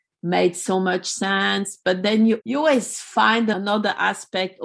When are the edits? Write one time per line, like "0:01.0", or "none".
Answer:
none